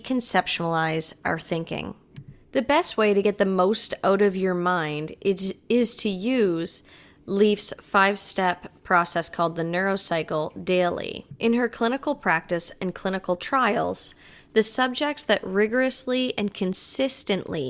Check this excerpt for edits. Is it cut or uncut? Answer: uncut